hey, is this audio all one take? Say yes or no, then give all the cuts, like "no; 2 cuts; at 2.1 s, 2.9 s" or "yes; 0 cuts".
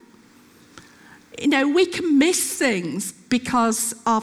yes; 0 cuts